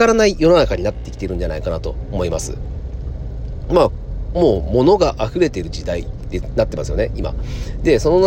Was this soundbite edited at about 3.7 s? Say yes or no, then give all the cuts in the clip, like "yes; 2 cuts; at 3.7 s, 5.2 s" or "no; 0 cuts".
no; 0 cuts